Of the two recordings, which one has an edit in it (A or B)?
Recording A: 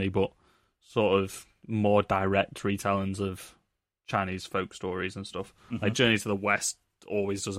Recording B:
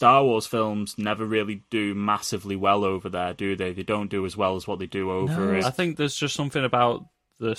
B